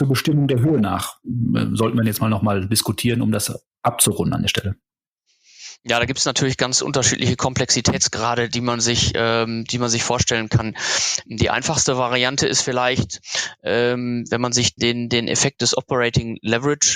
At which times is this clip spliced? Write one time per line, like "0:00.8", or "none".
0:14.8